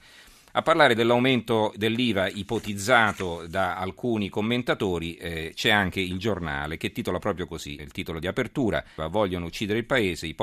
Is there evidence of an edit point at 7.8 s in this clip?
yes; 2 cuts; at 7.8 s, 9.0 s

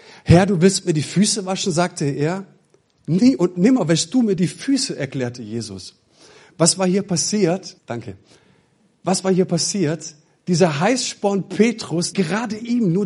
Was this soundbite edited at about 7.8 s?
yes; 2 cuts; at 7.8 s, 12.1 s

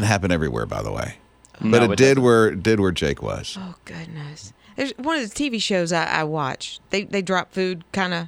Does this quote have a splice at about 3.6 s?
no; 0 cuts

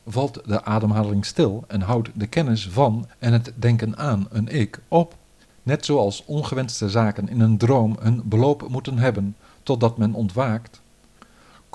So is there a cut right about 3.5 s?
no; 1 cut; at 5.4 s

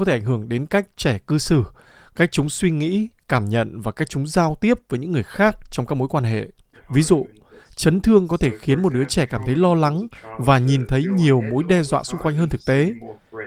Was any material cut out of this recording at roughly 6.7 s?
yes; 1 cut; at 6.7 s

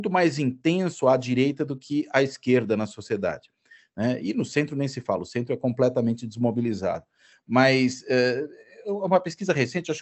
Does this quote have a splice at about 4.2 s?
no; 0 cuts

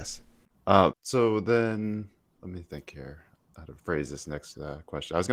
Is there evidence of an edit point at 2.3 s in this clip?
no; 1 cut; at 0.9 s

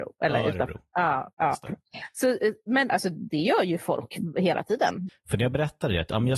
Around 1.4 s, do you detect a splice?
no; 2 cuts; at 2.9 s, 5.1 s

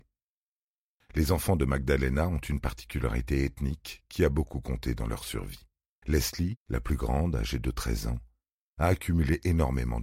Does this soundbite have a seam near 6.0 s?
yes; 1 cut; at 6.0 s

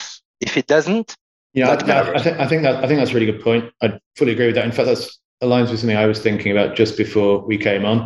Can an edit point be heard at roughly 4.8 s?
yes; 1 cut; at 4.8 s

